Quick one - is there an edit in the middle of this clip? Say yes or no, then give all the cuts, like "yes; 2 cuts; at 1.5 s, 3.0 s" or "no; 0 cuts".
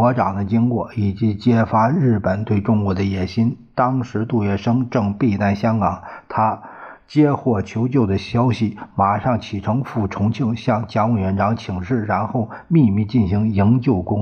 no; 0 cuts